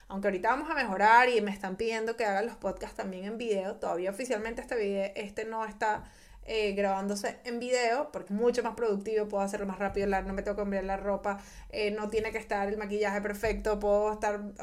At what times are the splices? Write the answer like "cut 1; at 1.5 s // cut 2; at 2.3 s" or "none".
cut 1; at 8.3 s